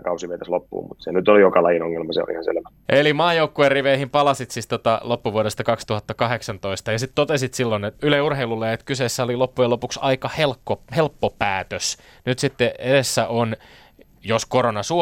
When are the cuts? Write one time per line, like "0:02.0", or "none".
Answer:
0:08.0